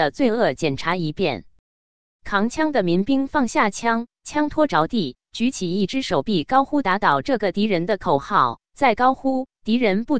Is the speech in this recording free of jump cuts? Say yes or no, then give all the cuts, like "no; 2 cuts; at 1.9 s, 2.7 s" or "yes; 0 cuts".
yes; 0 cuts